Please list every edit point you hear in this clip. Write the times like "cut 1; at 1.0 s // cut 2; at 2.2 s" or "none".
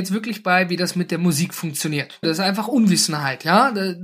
cut 1; at 2.2 s